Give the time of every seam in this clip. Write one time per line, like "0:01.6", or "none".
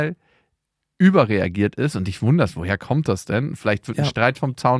none